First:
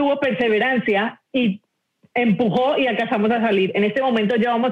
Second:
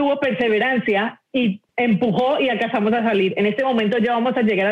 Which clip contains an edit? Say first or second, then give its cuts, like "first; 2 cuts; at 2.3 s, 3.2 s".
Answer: second; 1 cut; at 1.7 s